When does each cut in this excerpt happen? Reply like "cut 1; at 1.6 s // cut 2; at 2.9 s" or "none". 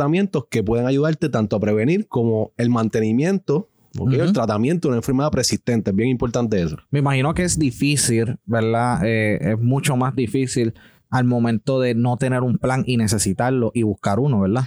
none